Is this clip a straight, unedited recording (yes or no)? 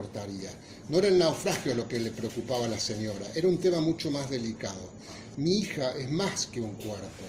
no